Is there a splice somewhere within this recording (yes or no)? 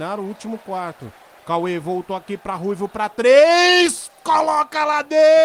no